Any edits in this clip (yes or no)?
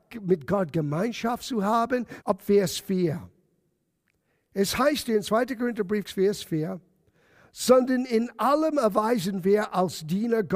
yes